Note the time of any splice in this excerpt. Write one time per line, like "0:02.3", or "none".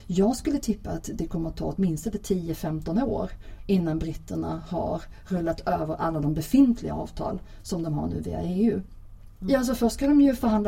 0:09.4